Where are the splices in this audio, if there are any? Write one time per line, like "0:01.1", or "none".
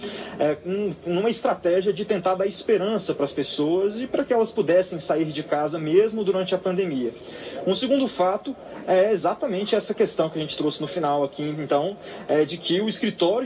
none